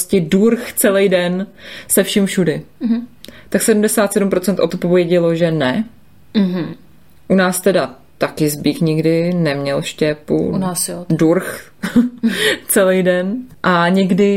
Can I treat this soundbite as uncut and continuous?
yes; 0 cuts

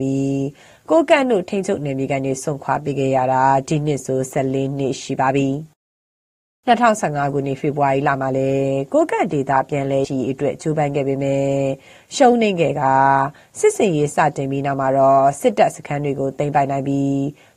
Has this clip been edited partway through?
yes; 1 cut; at 10.0 s

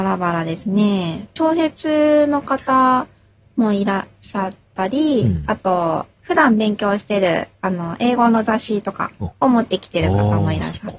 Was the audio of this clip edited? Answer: yes; 1 cut; at 1.4 s

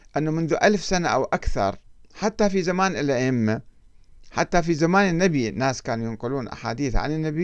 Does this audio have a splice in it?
no; 0 cuts

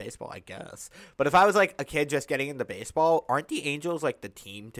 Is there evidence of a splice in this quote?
no; 0 cuts

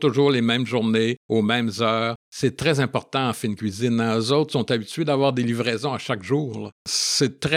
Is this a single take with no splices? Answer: yes; 0 cuts

